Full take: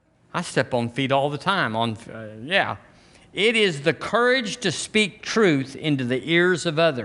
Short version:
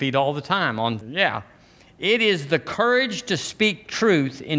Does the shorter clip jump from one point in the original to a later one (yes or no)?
yes